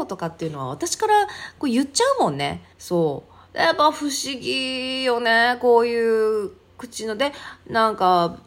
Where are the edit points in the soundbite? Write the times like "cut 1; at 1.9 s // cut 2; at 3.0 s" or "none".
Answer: cut 1; at 2.7 s